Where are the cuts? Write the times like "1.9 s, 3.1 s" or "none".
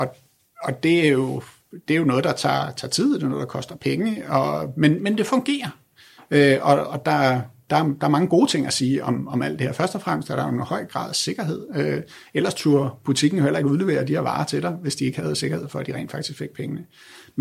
none